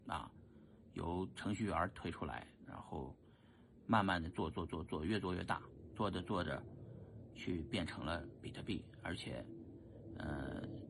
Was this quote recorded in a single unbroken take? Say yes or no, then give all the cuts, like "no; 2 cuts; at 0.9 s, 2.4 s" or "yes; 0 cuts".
yes; 0 cuts